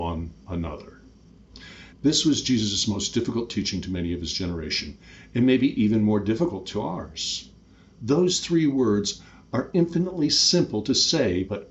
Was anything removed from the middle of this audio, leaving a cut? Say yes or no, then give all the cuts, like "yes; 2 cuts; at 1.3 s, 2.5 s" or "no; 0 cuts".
no; 0 cuts